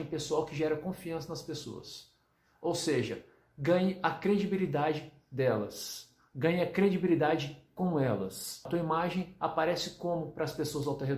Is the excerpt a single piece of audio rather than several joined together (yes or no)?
yes